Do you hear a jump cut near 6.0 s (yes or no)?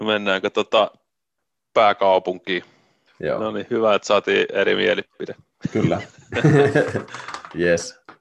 no